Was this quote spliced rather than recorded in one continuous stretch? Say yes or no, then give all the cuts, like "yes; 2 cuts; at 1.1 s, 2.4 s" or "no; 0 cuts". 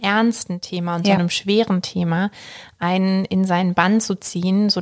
no; 0 cuts